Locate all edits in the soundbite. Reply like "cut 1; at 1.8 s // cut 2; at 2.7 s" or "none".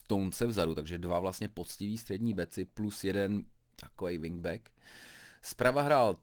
none